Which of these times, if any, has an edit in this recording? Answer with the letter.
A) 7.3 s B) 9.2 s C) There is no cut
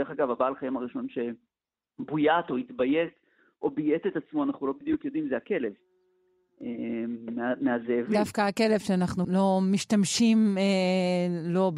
B